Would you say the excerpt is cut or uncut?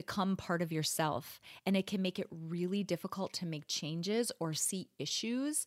uncut